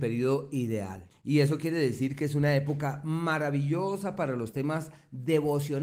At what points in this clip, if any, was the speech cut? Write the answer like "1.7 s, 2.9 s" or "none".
1.1 s